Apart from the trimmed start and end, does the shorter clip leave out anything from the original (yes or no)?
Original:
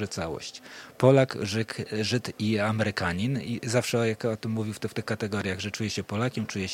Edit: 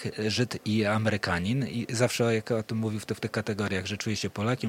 no